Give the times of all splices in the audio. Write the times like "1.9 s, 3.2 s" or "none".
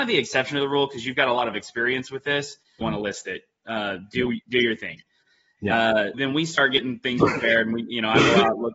2.8 s, 6.1 s